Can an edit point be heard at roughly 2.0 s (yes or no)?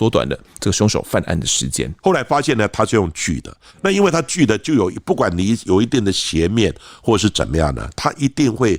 yes